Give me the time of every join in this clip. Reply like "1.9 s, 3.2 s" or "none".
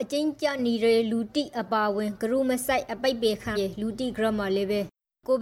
3.6 s